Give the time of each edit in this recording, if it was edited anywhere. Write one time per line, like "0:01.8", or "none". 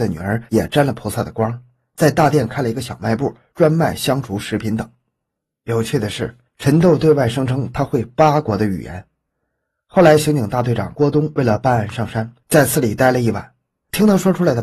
none